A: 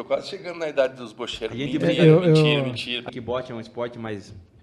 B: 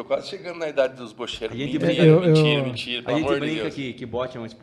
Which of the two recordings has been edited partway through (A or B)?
A